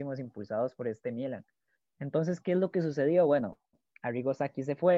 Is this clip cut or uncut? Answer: uncut